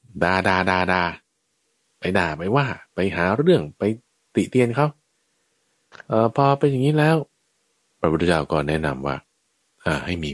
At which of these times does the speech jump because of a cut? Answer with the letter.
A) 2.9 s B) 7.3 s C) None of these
A